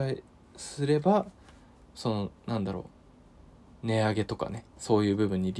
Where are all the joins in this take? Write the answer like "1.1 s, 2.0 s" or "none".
none